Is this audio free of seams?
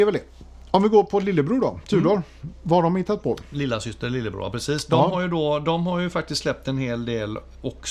yes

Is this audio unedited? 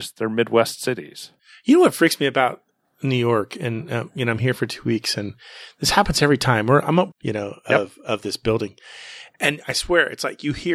no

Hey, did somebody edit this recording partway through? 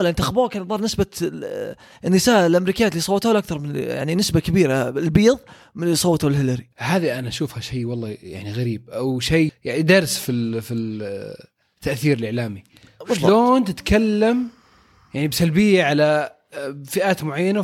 yes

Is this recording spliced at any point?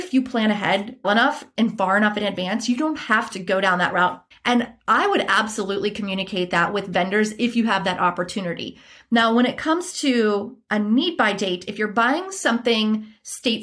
yes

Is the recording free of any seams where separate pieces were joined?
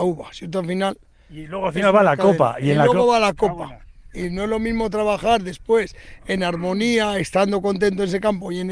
yes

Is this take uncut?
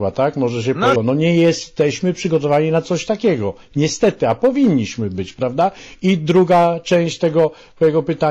no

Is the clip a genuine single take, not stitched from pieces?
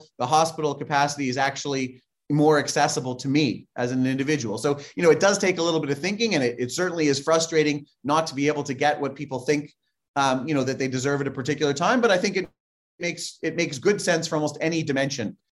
yes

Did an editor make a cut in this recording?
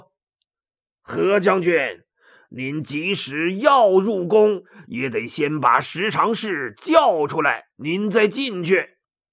no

